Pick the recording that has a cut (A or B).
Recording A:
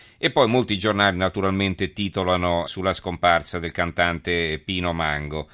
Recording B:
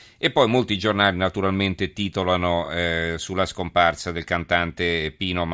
A